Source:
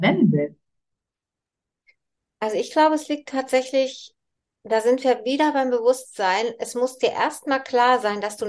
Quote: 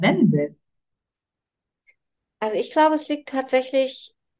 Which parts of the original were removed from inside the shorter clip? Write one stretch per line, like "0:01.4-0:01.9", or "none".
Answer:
none

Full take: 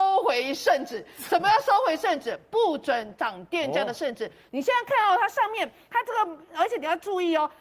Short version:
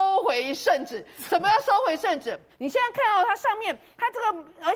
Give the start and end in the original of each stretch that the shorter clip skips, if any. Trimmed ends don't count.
0:02.5-0:04.4

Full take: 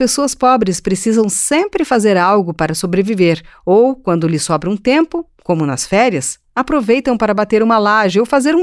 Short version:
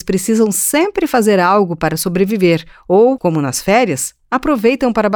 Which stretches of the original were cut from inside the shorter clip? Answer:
0:04.0-0:05.4

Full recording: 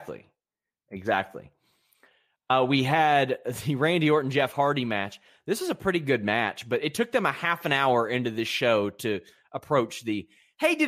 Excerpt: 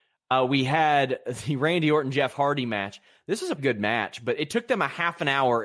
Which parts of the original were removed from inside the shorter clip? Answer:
0:05.8-0:06.0

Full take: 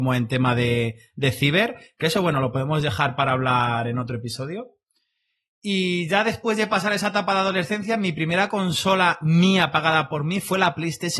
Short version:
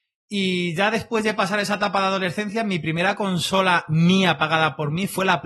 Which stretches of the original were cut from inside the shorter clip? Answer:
none

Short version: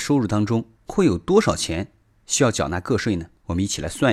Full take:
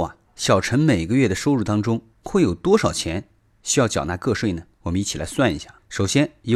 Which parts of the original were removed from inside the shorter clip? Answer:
none

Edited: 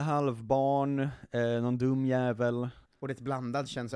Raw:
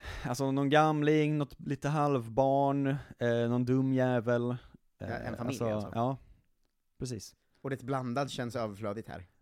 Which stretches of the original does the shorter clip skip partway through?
0:04.7-0:07.5

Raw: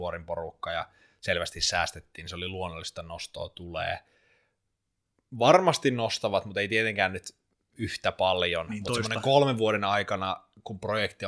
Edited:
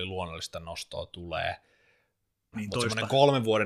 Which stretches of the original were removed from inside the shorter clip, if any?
0:05.0-0:08.7

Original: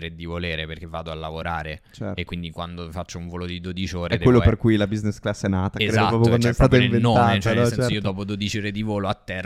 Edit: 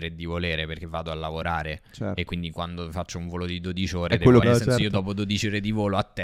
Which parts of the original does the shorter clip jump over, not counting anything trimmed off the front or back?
0:04.4-0:07.5

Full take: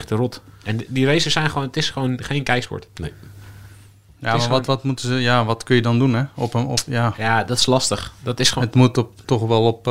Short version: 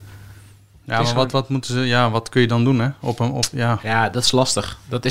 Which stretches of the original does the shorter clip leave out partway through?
none

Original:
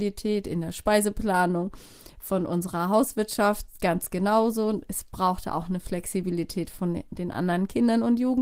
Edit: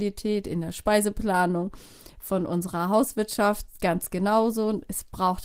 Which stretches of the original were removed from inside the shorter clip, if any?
none

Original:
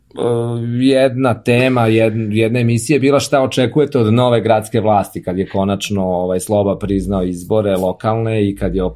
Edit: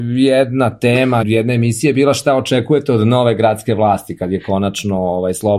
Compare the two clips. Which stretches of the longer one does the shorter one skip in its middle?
0:01.9-0:02.3

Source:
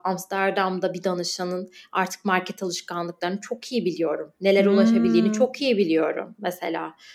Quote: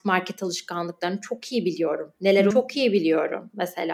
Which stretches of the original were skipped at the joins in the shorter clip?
0:04.7-0:05.3

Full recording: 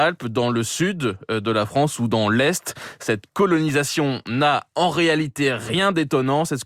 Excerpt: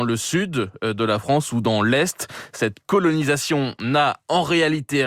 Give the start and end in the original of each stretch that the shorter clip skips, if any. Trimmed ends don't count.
none

